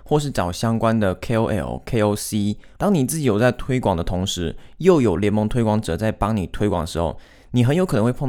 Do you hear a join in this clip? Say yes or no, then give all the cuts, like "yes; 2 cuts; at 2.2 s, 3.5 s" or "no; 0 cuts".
yes; 1 cut; at 2.8 s